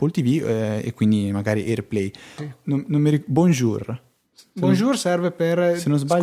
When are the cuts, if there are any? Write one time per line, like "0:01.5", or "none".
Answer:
0:02.4